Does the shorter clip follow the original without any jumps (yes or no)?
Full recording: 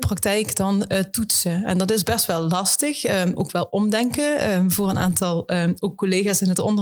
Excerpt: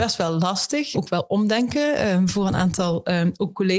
no